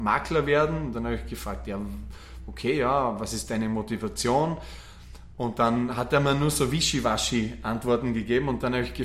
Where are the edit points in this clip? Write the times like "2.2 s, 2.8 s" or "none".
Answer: none